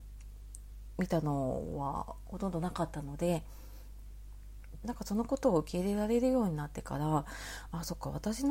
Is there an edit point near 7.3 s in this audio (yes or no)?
no